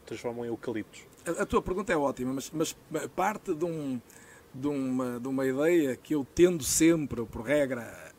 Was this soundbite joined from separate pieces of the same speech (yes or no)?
no